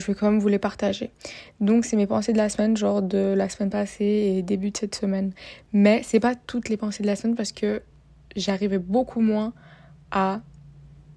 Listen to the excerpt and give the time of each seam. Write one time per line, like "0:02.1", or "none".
none